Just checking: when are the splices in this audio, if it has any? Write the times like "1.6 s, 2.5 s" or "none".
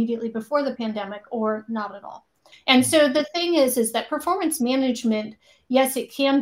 2.5 s